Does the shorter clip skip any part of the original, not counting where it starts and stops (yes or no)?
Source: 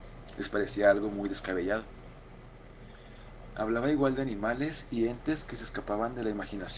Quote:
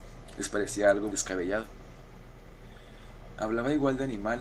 yes